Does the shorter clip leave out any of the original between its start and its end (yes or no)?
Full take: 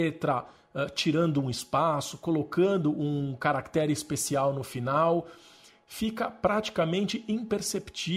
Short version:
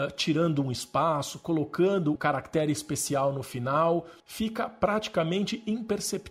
yes